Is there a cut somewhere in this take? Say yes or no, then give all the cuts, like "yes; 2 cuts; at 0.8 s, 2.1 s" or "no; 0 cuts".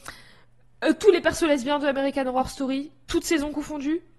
no; 0 cuts